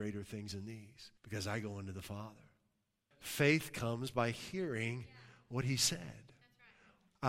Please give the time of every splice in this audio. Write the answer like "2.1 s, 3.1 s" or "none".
1.2 s, 3.1 s